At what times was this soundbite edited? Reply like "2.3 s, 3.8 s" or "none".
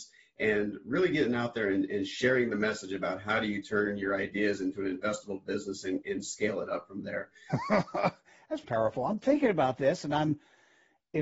7.5 s, 8.6 s